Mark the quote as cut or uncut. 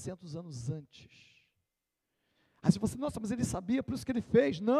uncut